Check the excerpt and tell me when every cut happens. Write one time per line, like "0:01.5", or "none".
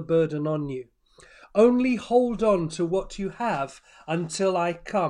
none

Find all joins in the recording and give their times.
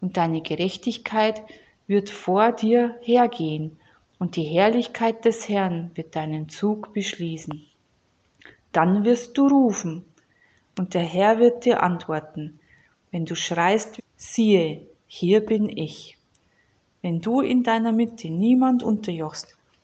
0:14.0

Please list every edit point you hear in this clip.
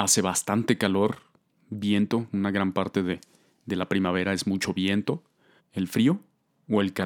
0:05.6

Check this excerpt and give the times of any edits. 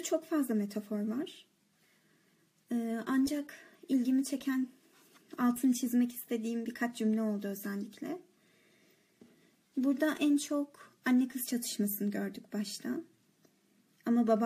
none

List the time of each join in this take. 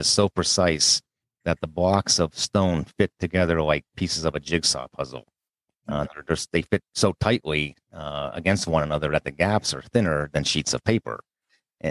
none

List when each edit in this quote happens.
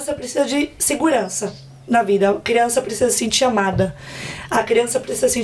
none

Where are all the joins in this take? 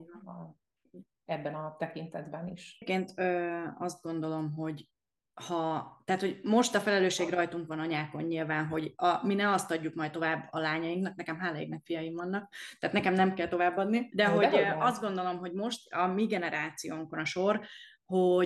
0:14.1

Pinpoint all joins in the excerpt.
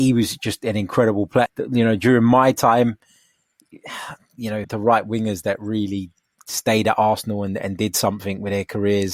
0:01.5
0:04.6

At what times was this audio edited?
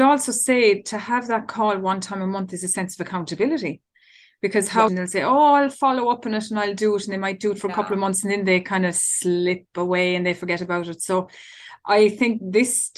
0:04.9

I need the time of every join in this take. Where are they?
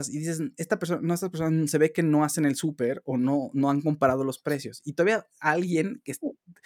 none

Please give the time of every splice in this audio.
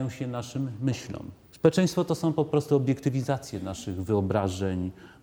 0:01.4

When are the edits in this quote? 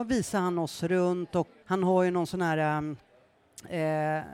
0:01.6

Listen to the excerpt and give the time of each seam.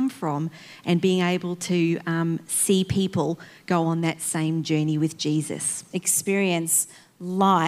0:05.9

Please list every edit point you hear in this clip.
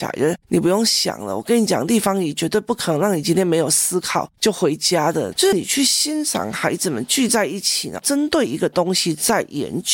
0:05.3

